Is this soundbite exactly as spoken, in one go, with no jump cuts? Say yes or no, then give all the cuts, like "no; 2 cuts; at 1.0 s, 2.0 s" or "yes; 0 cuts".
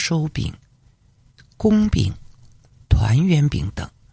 yes; 0 cuts